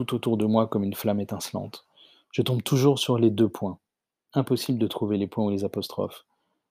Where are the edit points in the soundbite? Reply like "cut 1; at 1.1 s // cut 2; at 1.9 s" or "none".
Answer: none